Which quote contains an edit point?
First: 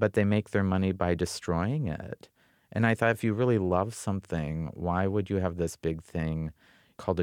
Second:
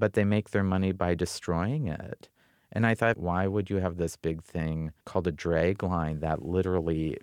second; 2 cuts; at 3.1 s, 5.0 s

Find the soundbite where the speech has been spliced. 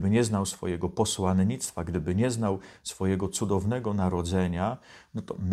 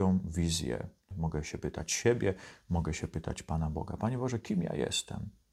second; 1 cut; at 1.1 s

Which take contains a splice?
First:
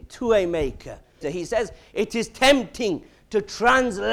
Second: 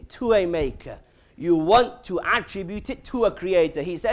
first; 1 cut; at 1.2 s

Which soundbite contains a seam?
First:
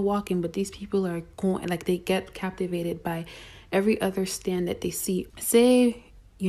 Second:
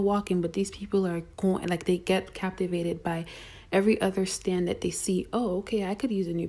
first; 1 cut; at 5.3 s

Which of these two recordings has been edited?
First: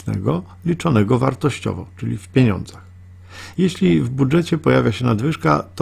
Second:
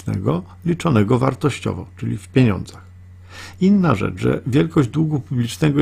first; 1 cut; at 3.5 s

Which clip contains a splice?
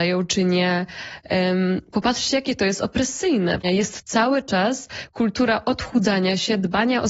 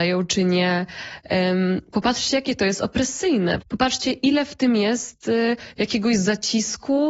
first; 1 cut; at 3.6 s

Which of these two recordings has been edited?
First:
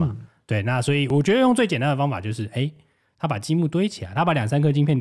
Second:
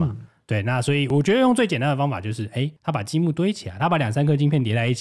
second; 1 cut; at 2.8 s

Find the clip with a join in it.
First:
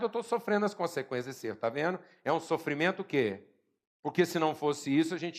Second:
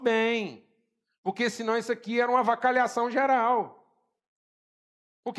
first; 1 cut; at 4.0 s

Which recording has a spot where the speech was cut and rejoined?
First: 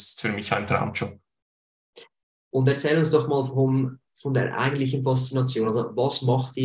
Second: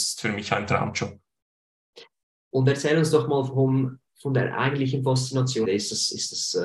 second; 1 cut; at 5.6 s

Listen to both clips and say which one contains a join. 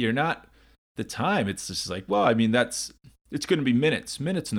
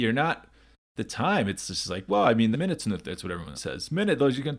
second; 2 cuts; at 2.5 s, 3.5 s

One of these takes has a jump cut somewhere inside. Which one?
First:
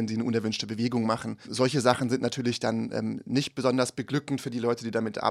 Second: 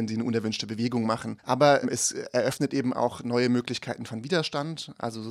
second; 1 cut; at 1.4 s

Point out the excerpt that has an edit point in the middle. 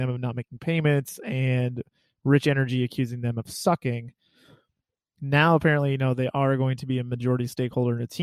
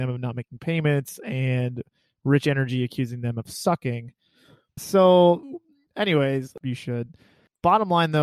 second; 2 cuts; at 4.8 s, 6.6 s

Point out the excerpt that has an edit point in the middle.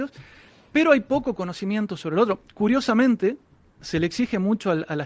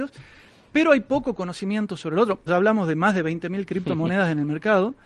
second; 1 cut; at 2.5 s

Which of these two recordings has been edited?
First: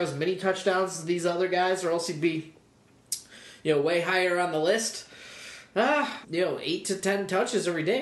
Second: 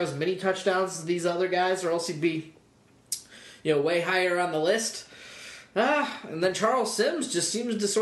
first; 1 cut; at 6.2 s

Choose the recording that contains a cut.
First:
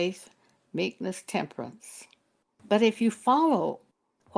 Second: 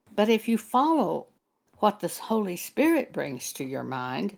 first; 1 cut; at 2.5 s

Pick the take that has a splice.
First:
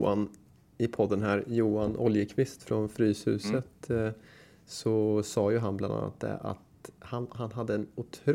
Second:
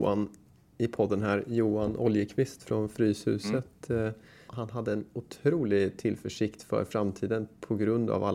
second; 1 cut; at 4.5 s

